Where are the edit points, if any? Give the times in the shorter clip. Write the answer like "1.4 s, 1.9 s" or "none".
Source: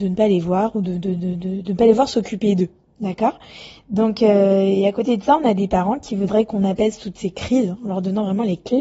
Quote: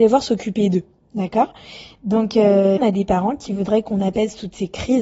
2.8 s